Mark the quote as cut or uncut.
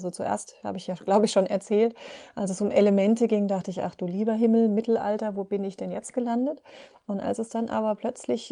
uncut